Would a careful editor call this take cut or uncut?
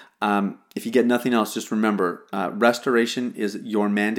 uncut